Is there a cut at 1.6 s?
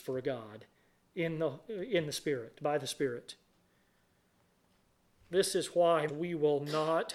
no; 1 cut; at 6.1 s

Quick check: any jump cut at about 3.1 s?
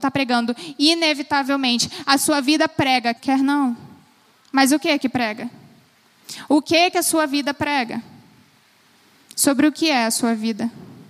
yes; 1 cut; at 3.1 s

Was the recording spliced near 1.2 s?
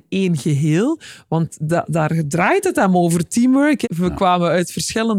no; 1 cut; at 3.8 s

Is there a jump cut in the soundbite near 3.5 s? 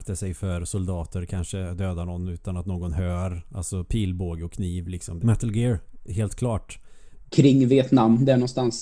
no; 2 cuts; at 5.2 s, 7.3 s

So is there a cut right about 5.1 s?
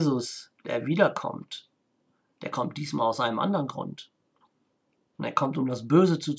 yes; 1 cut; at 5.1 s

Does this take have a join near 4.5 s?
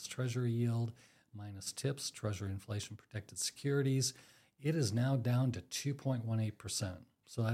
no; 0 cuts

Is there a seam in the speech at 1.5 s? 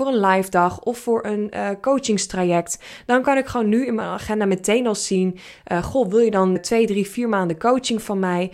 no; 1 cut; at 6.6 s

